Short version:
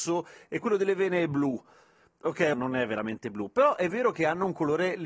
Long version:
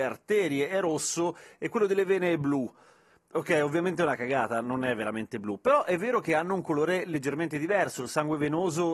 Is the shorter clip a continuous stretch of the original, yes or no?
no